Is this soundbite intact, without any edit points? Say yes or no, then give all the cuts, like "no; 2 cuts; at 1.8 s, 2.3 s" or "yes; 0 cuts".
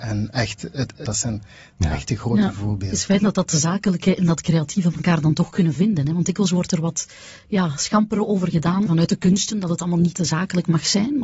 no; 3 cuts; at 1.1 s, 8.9 s, 10.1 s